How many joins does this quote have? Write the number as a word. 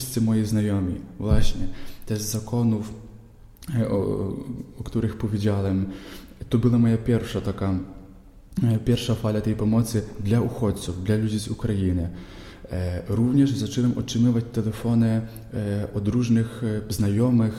zero